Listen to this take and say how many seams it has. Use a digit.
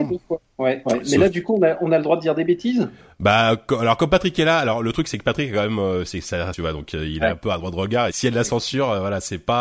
2